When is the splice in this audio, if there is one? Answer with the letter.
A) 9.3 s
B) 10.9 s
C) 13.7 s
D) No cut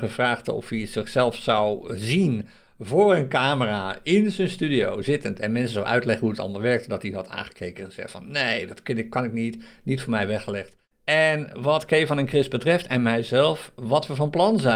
B